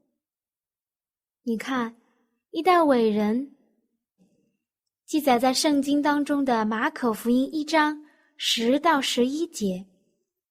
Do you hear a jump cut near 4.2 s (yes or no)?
yes